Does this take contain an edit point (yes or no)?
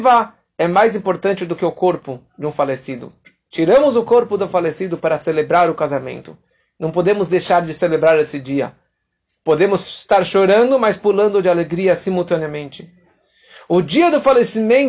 no